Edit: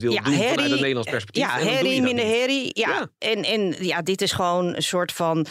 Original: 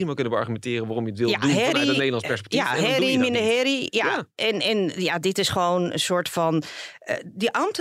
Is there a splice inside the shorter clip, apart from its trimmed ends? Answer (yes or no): no